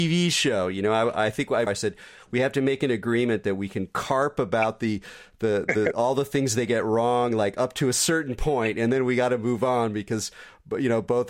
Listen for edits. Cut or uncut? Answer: cut